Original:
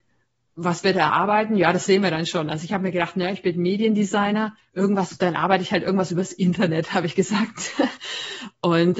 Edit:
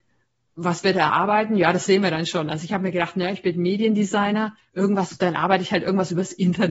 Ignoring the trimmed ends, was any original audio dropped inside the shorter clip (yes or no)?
no